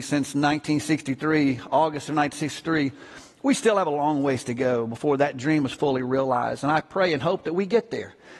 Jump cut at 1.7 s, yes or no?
no